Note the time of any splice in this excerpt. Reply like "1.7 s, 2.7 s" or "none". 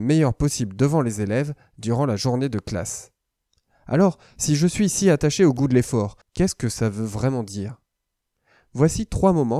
6.2 s